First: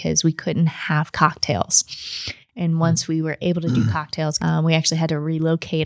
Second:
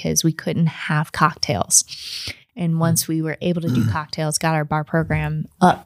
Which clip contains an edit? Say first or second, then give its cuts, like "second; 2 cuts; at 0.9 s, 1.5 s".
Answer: first; 1 cut; at 4.4 s